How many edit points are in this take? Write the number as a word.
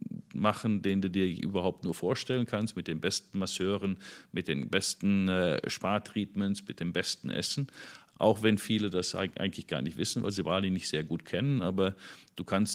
one